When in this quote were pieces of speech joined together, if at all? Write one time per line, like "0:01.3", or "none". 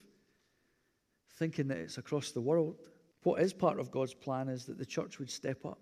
0:03.1